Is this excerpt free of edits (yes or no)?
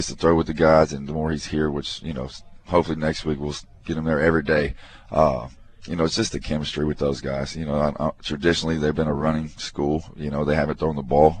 yes